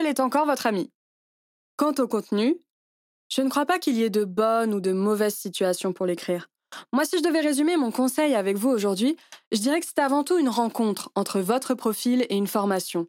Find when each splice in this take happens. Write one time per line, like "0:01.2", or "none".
none